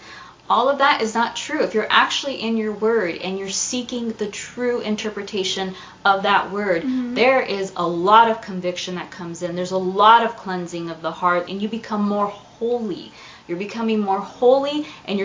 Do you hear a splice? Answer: yes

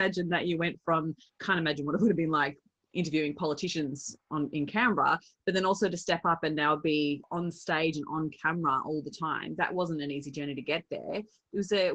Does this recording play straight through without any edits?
yes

